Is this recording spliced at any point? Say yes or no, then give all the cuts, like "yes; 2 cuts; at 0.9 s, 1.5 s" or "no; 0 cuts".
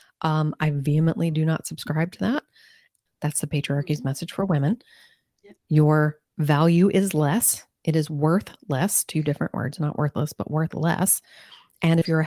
yes; 2 cuts; at 3.1 s, 5.6 s